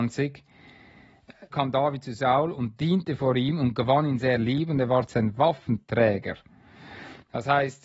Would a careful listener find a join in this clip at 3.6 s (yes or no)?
no